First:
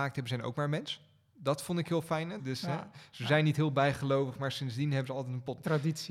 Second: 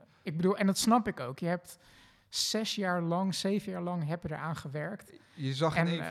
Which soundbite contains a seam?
first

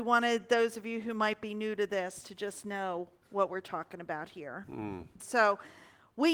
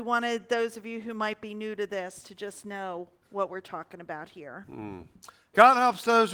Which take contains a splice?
first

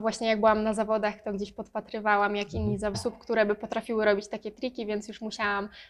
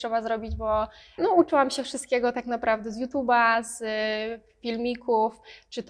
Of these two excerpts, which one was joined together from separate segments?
first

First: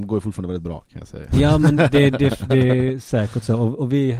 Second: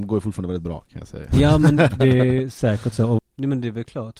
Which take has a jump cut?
second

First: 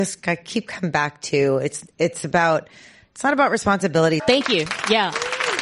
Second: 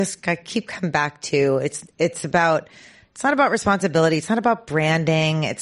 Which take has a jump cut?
first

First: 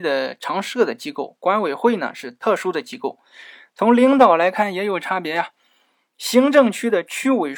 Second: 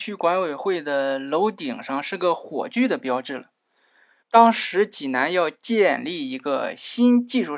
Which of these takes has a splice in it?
second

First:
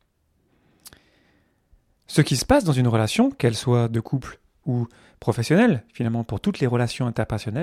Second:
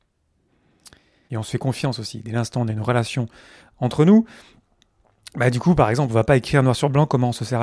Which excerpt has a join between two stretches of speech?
second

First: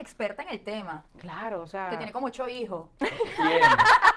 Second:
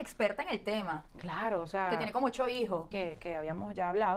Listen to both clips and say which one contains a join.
second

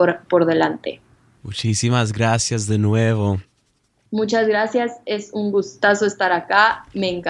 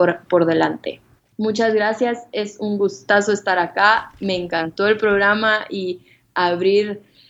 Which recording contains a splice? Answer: second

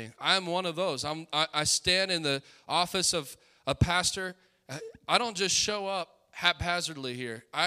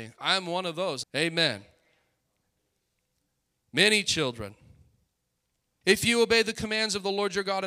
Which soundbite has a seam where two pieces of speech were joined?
second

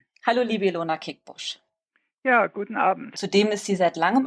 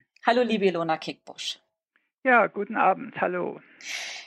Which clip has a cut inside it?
first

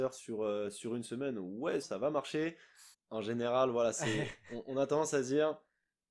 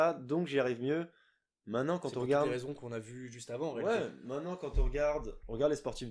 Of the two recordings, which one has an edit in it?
first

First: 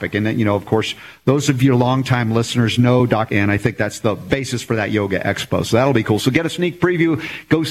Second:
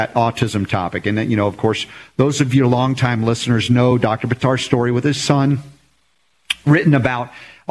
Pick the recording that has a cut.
first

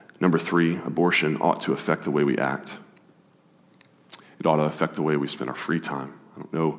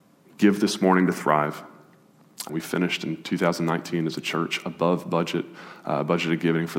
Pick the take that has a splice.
second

